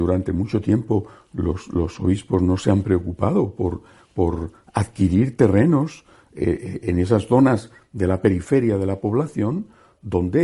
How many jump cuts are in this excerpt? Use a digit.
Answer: 0